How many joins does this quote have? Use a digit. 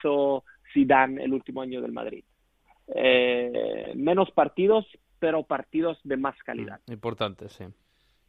0